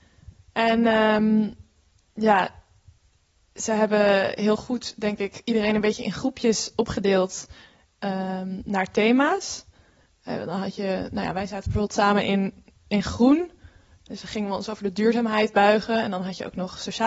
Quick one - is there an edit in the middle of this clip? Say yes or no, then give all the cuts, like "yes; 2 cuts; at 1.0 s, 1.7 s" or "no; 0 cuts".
no; 0 cuts